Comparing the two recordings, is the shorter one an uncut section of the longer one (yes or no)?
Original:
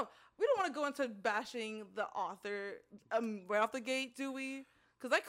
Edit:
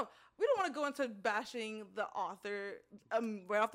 yes